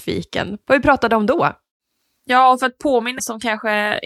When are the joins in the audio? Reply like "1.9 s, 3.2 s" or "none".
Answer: 3.2 s